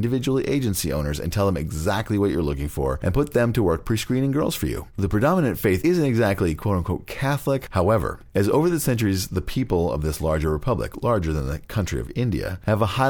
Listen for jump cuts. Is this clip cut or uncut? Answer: cut